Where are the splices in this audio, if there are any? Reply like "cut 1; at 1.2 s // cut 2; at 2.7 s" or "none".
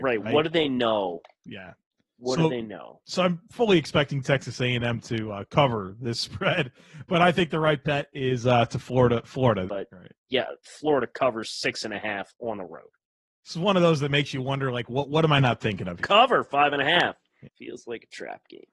cut 1; at 9.7 s // cut 2; at 16.0 s // cut 3; at 17.4 s